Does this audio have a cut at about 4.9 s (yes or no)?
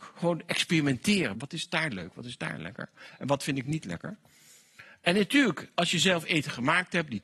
no